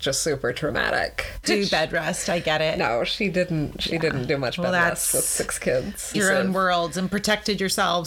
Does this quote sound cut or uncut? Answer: cut